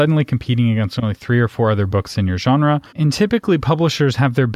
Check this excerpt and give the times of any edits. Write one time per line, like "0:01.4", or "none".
0:02.9